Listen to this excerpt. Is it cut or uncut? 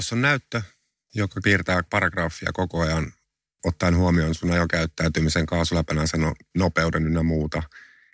uncut